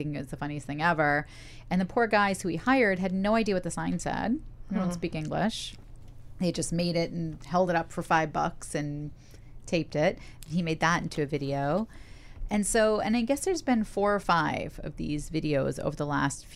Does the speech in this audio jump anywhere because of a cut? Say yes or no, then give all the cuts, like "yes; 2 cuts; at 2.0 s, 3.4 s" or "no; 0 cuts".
no; 0 cuts